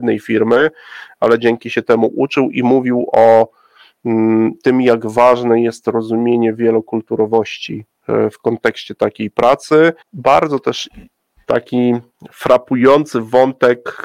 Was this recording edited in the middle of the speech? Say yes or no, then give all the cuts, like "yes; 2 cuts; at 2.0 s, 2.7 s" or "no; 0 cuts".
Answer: yes; 1 cut; at 10.0 s